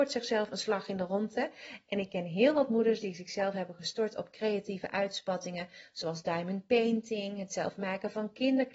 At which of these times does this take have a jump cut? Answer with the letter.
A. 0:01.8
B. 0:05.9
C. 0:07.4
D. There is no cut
D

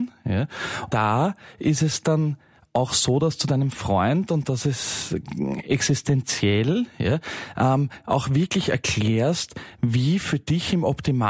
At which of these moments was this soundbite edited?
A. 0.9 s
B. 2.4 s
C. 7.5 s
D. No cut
A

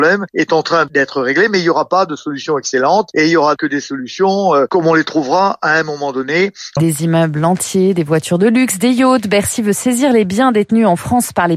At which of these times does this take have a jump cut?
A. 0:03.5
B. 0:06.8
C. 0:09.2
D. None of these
B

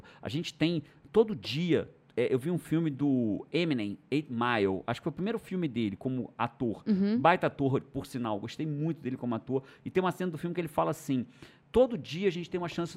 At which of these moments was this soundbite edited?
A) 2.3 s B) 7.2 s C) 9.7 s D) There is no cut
D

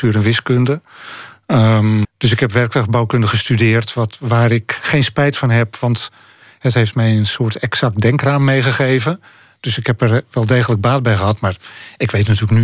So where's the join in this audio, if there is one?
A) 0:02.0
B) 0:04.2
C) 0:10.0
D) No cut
A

